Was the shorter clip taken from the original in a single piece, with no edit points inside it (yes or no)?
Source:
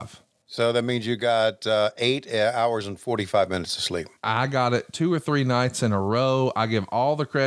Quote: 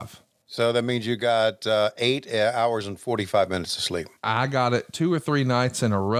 yes